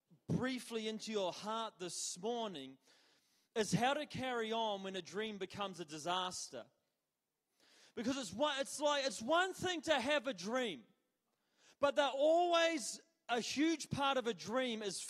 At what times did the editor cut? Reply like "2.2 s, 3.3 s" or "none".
none